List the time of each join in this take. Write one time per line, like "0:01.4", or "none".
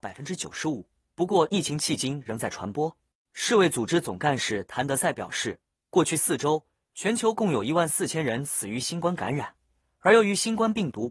none